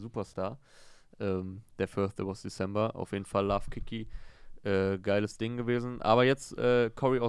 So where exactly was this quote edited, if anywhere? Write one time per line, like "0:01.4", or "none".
none